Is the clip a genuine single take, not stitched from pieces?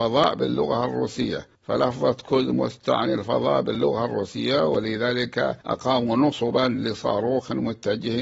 no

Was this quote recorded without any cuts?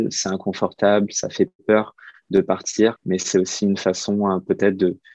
no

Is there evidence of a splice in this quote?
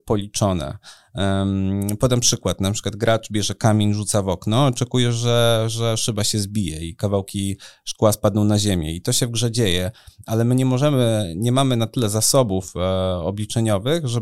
no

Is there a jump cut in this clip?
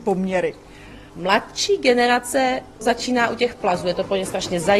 no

